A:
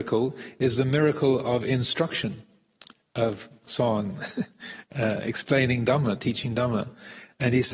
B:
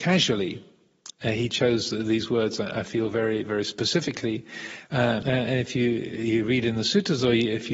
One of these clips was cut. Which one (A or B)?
B